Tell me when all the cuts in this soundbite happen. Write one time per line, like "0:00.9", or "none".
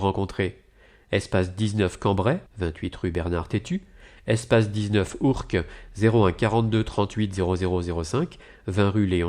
0:02.5